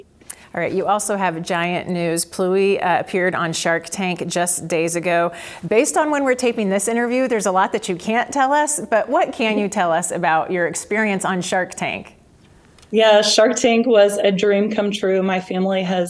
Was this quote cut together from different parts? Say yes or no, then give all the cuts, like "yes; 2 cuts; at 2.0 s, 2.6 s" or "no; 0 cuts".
no; 0 cuts